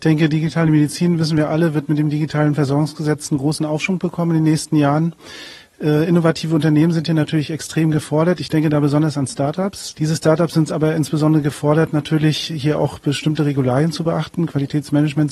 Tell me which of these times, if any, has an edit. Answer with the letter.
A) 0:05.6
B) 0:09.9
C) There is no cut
B